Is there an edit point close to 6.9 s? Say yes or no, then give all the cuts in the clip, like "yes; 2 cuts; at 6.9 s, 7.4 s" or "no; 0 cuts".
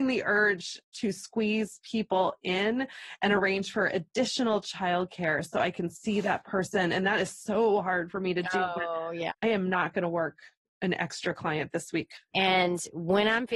no; 2 cuts; at 9.3 s, 12.3 s